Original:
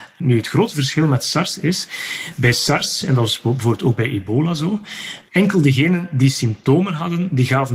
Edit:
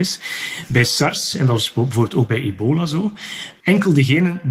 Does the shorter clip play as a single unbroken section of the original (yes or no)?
yes